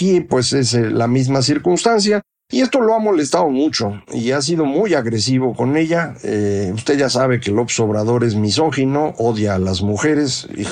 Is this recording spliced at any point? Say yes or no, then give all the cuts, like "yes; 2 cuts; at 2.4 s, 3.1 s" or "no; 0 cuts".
yes; 1 cut; at 2.3 s